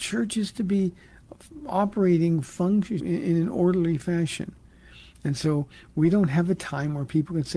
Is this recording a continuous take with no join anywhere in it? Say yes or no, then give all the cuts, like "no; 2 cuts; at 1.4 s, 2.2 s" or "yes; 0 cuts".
no; 1 cut; at 3.0 s